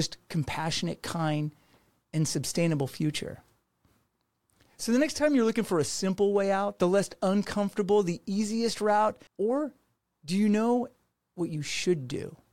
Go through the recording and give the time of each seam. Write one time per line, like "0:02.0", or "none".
0:09.3